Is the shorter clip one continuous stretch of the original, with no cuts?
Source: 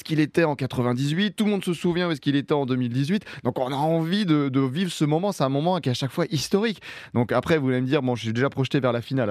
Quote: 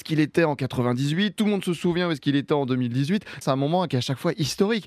no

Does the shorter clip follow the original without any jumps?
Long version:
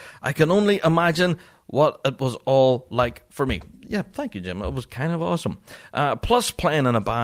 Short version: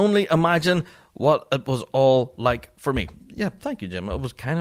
yes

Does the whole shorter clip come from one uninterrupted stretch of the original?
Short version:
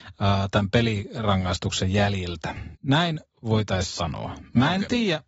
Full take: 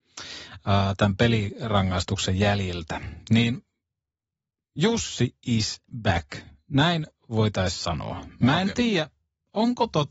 no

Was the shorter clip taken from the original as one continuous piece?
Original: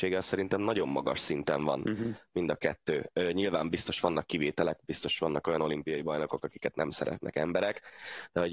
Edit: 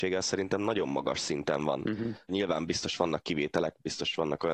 no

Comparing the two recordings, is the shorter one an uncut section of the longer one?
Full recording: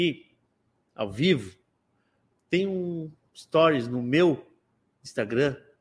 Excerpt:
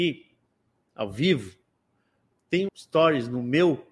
no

